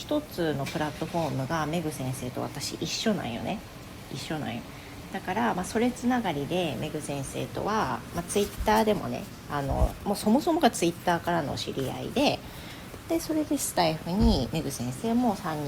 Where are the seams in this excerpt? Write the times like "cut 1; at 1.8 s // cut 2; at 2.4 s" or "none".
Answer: none

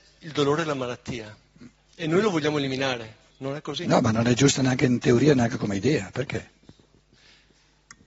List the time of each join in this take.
cut 1; at 3.3 s

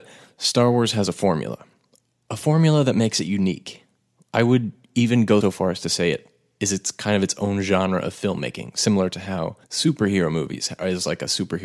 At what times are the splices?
cut 1; at 5.4 s // cut 2; at 9.6 s

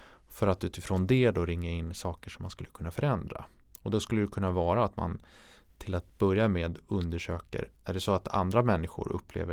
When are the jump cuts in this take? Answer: cut 1; at 7.8 s

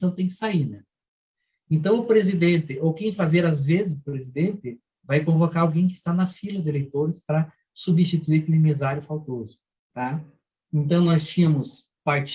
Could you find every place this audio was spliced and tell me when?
cut 1; at 9.7 s

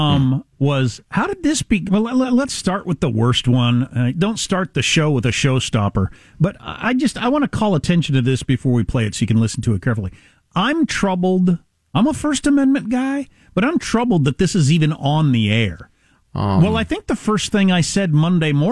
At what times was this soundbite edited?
cut 1; at 1.9 s // cut 2; at 16.1 s

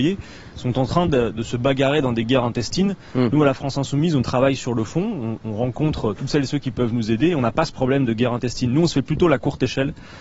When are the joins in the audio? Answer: none

